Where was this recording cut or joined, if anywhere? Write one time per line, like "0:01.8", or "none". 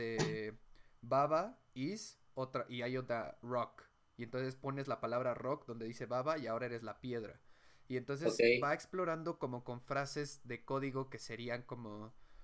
none

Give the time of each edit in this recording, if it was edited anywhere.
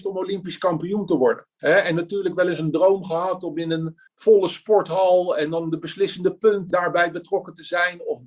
0:04.1
0:06.7

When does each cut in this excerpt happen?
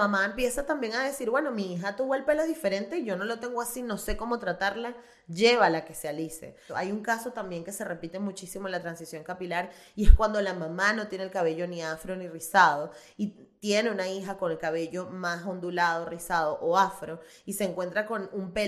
0:06.7

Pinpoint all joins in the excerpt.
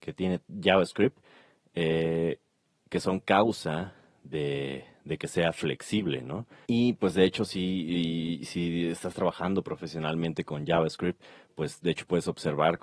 0:06.7

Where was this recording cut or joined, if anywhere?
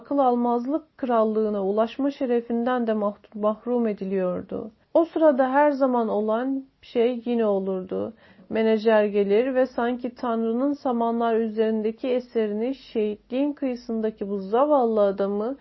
0:04.8

